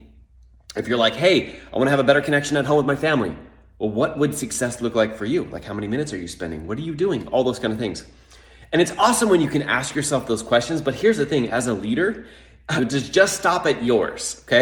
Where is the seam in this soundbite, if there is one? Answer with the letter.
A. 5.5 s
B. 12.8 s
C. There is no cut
B